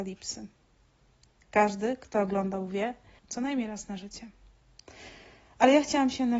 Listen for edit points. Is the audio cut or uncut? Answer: cut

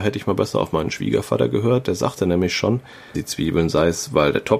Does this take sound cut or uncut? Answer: cut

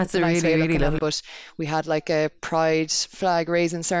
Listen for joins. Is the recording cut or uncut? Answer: cut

